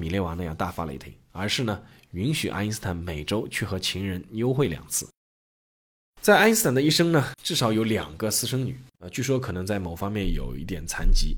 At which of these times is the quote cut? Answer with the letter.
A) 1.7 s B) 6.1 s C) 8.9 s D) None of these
C